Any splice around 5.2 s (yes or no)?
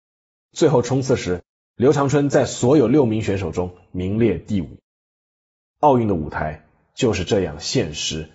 no